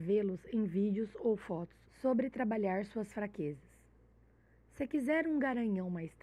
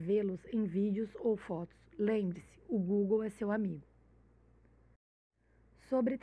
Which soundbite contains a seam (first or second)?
first